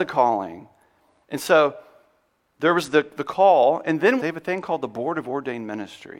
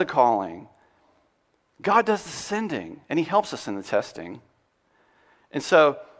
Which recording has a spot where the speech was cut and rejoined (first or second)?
first